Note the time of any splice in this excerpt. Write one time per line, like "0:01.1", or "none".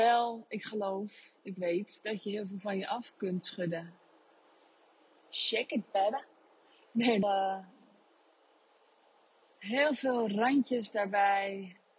0:07.2